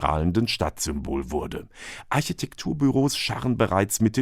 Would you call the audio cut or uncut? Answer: uncut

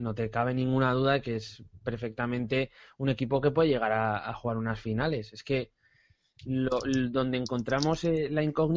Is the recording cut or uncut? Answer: uncut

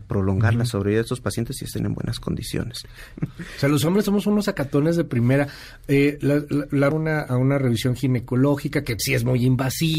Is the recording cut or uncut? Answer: cut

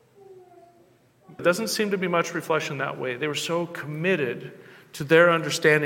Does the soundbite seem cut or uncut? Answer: cut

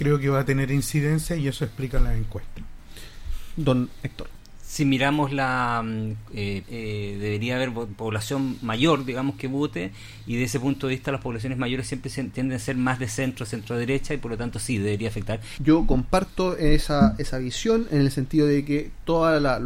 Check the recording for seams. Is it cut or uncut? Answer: cut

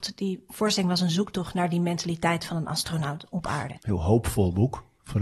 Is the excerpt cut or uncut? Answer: cut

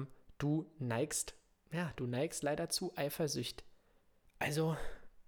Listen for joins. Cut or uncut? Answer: cut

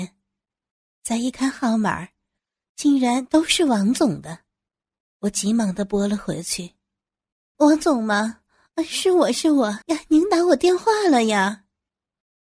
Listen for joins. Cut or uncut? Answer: cut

